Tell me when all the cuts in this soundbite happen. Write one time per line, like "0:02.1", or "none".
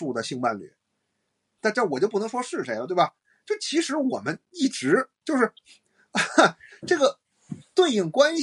0:01.6